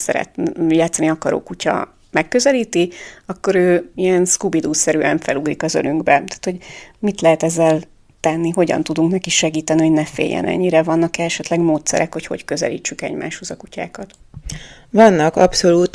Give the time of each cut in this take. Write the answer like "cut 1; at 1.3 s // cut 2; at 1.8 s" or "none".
none